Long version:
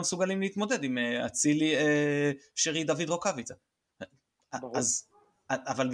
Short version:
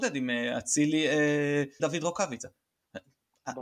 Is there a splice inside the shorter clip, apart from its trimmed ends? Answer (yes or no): yes